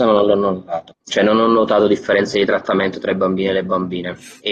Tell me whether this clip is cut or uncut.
cut